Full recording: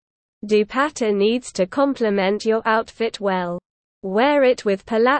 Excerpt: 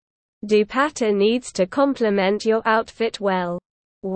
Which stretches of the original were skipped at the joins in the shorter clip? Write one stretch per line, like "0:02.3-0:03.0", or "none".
none